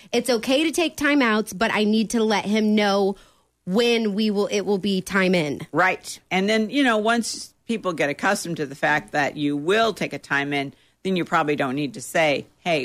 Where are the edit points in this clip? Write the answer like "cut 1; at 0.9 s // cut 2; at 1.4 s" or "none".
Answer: none